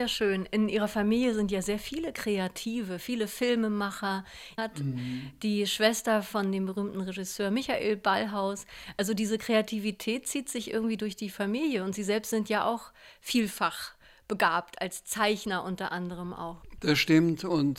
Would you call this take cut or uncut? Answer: cut